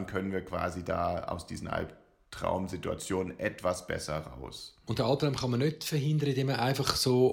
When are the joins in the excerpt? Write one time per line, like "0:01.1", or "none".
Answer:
none

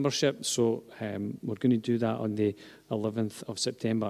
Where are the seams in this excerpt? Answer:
none

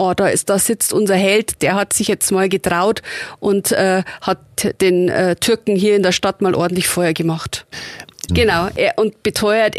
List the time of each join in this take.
0:08.3

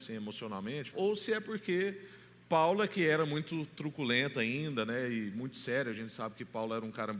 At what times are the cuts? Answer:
0:00.9

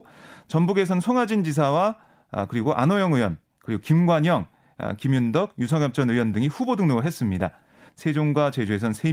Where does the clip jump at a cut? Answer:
0:07.9

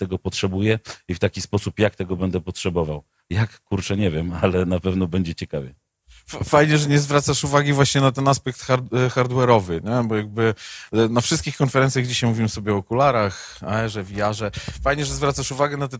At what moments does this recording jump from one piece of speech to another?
none

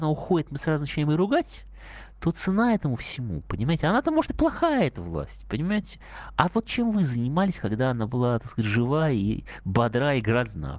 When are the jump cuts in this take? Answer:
none

